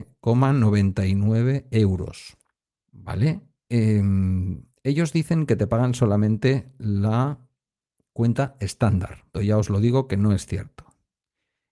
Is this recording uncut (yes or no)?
no